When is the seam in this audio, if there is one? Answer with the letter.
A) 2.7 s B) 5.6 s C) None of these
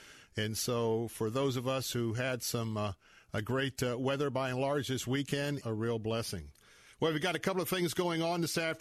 B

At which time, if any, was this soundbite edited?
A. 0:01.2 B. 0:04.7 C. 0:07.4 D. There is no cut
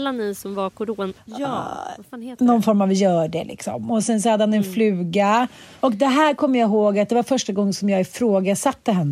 A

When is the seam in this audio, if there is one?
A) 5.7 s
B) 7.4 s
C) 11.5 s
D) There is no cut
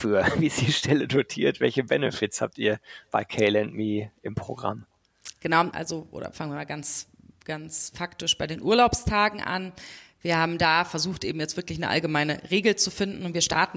A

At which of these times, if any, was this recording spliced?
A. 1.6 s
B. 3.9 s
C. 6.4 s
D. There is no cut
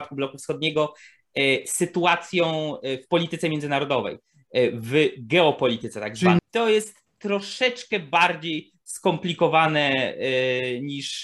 C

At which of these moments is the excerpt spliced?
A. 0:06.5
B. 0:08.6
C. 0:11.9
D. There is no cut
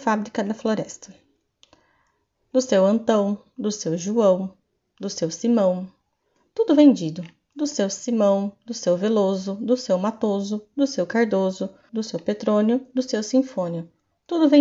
C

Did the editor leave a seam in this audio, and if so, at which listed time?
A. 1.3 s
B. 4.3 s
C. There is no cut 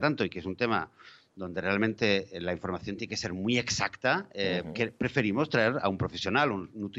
C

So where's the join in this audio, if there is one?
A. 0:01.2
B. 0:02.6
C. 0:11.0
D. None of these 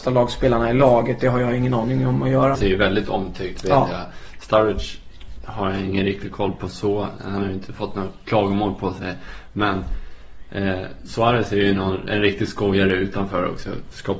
B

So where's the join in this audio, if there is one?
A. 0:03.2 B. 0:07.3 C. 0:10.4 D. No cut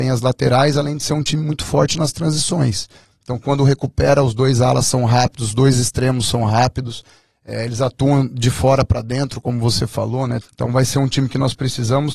C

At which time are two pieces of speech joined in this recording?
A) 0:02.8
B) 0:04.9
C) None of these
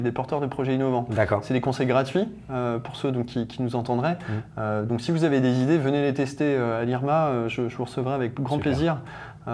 C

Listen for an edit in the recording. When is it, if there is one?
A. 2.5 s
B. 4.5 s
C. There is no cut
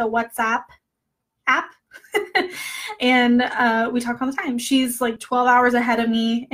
C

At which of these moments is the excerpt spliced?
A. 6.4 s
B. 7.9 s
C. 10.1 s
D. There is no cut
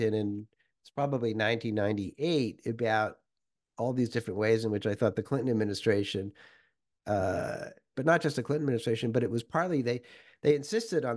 B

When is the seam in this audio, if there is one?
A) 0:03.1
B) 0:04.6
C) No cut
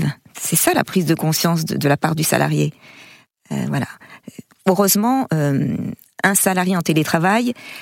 C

